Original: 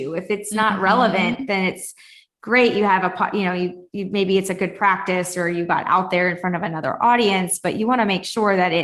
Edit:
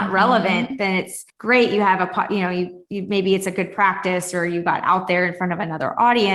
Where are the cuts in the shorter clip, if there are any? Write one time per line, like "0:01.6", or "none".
0:01.3